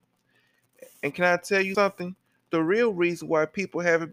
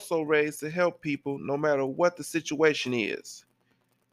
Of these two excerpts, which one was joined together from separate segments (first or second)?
first